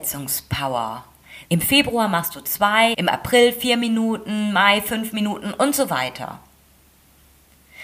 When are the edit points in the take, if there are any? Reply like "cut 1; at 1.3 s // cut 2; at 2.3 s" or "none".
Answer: cut 1; at 1.5 s // cut 2; at 2.9 s